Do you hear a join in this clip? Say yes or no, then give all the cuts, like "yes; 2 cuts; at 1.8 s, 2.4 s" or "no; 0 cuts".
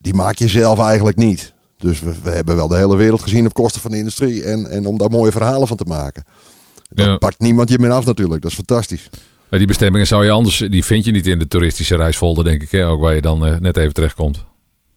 no; 0 cuts